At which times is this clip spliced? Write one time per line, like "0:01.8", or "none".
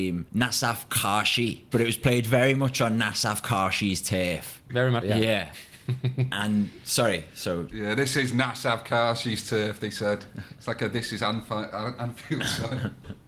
0:05.0